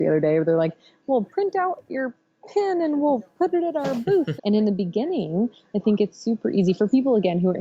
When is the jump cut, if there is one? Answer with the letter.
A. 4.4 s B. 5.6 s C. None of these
A